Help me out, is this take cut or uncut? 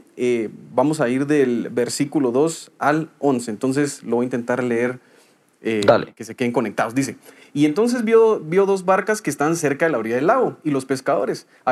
uncut